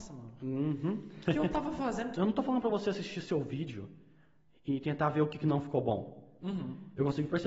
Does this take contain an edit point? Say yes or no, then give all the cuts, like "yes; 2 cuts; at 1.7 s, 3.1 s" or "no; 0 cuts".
yes; 2 cuts; at 2.1 s, 6.4 s